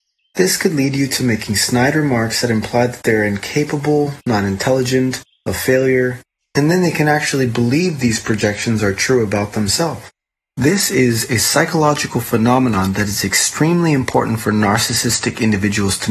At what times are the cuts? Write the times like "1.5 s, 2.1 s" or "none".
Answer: none

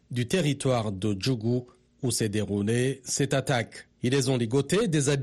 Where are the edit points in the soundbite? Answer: 3.9 s

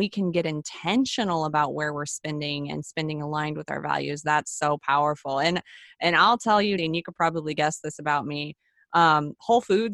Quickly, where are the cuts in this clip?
6.8 s

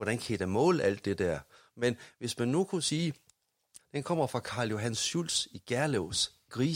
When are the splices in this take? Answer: 1.7 s, 3.8 s

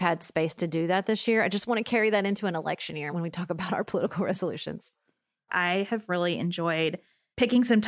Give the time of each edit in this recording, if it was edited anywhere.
3.1 s, 5.5 s

